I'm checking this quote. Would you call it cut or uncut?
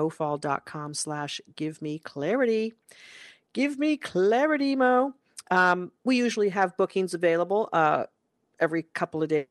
uncut